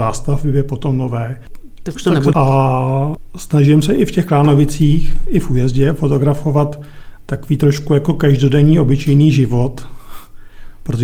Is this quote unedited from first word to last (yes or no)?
no